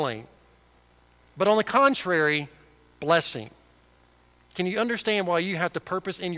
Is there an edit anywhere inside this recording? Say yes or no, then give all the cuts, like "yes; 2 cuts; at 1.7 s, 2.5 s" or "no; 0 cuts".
no; 0 cuts